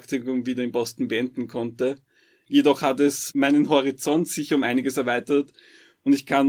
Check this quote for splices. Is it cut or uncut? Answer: uncut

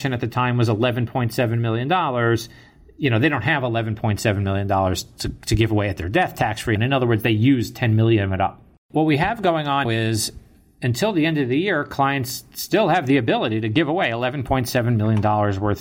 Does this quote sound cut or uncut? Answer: cut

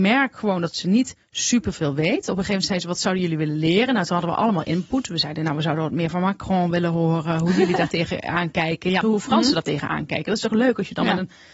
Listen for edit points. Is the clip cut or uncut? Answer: cut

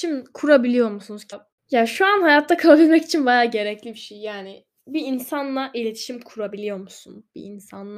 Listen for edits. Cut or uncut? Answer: cut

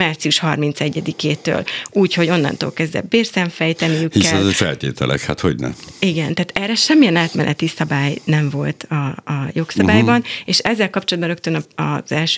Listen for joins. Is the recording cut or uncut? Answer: uncut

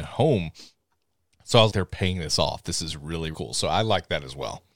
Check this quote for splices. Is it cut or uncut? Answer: cut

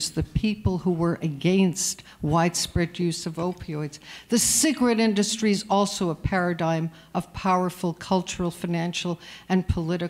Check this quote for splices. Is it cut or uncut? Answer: uncut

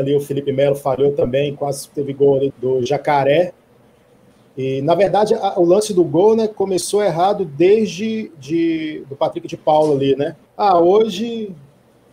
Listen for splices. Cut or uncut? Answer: cut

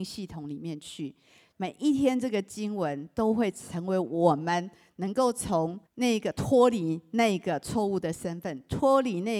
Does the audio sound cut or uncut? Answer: cut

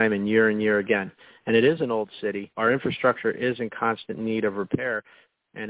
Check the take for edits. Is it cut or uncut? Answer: cut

